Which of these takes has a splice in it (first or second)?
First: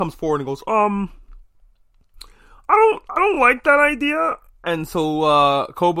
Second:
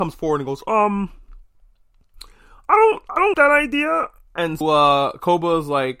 second